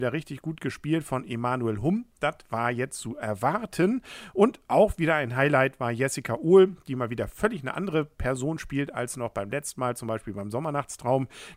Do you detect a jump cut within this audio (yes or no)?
no